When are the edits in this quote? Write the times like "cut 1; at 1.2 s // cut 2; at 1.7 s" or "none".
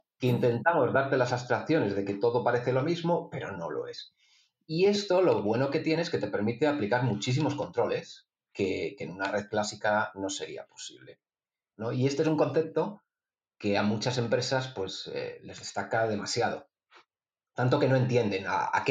cut 1; at 11.7 s